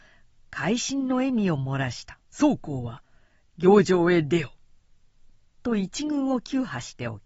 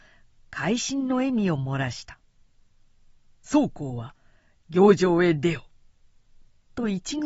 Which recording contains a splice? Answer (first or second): first